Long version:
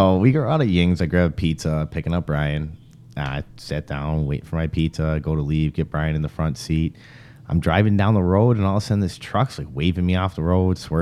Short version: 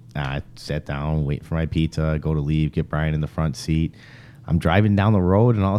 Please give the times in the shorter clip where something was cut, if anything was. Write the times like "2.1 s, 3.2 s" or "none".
none